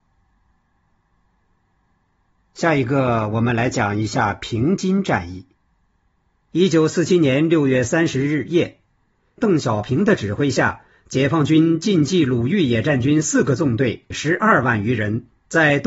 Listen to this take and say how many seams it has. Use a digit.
3